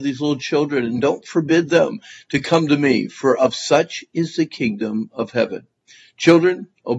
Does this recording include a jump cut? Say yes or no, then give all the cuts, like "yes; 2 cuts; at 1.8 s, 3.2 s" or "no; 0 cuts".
no; 0 cuts